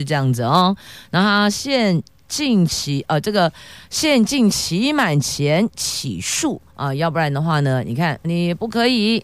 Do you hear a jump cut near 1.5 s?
no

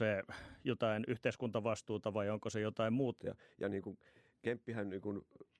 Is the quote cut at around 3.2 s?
yes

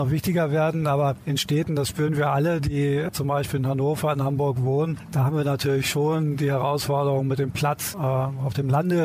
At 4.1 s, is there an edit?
no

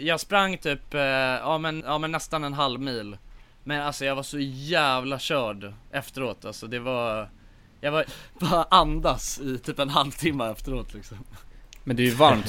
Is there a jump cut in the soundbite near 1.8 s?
yes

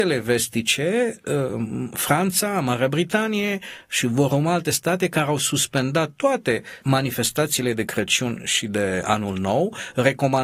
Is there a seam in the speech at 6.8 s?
yes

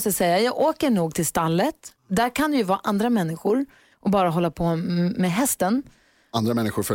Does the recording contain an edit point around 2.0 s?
yes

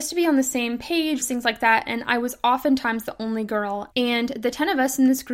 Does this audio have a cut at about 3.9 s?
yes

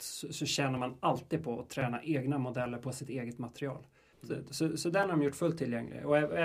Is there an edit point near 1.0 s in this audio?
no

